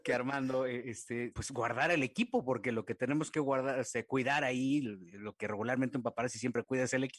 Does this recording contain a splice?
no; 0 cuts

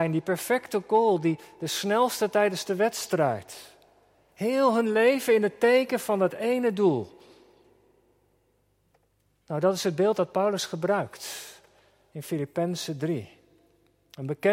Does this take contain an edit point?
no; 0 cuts

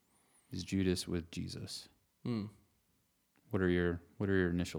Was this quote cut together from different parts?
no; 0 cuts

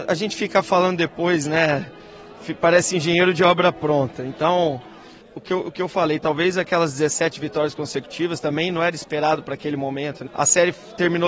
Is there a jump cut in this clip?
yes; 2 cuts; at 5.2 s, 10.3 s

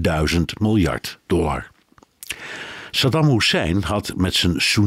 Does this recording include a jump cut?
no; 0 cuts

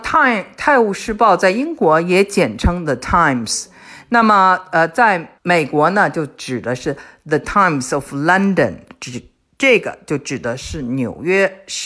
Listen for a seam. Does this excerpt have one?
yes; 1 cut; at 5.4 s

